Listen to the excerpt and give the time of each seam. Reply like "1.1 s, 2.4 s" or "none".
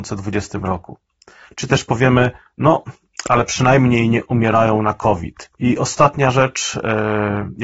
1.4 s, 5.6 s